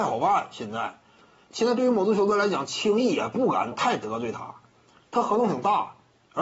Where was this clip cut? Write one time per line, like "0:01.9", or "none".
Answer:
0:01.5

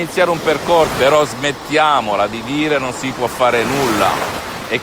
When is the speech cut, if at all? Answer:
0:00.9

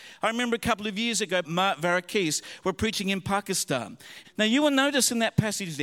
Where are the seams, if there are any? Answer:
0:01.4
0:04.2

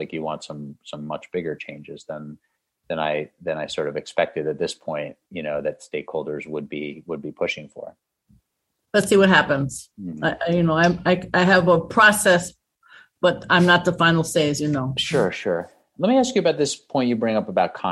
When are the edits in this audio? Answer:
none

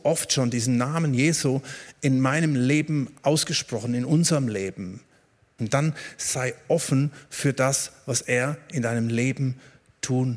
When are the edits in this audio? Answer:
0:05.6

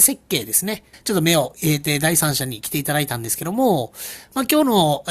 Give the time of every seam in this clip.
0:00.9

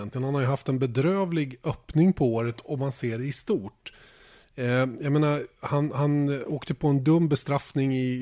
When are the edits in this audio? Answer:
none

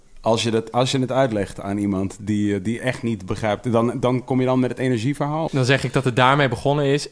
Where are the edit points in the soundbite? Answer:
0:05.5

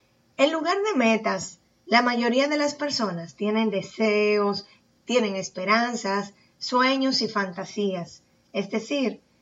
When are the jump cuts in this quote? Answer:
none

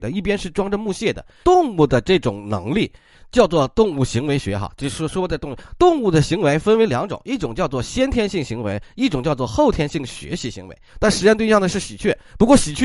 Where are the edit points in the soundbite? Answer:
0:01.4
0:10.9

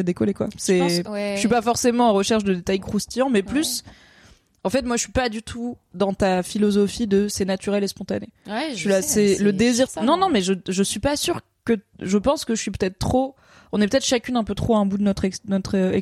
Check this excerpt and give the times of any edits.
0:09.9

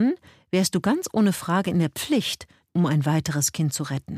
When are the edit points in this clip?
0:02.6

